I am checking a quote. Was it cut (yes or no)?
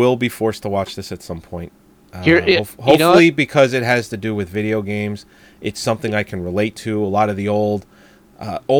no